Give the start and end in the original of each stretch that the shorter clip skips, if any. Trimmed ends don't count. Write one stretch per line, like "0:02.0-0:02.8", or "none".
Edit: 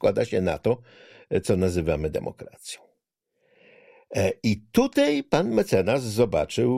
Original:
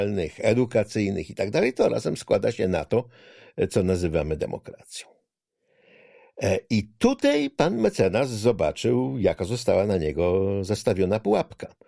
none